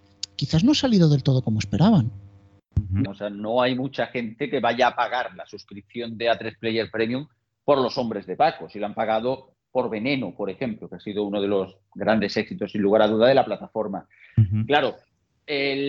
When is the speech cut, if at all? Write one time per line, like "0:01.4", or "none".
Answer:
0:03.1